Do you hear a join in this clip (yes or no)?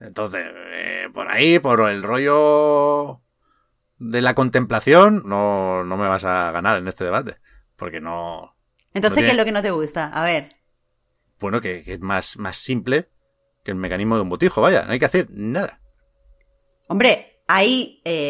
yes